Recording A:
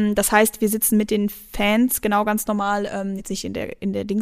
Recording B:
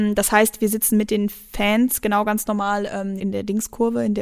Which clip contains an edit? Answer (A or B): B